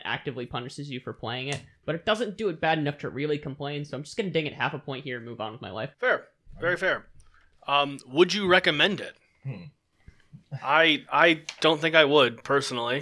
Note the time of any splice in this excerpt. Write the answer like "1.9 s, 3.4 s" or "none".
5.9 s